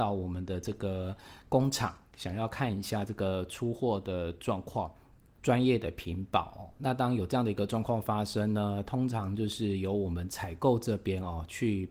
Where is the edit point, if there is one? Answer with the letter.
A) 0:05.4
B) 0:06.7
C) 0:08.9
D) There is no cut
A